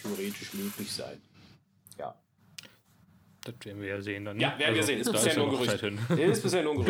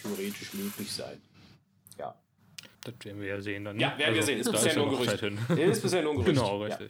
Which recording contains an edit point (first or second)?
second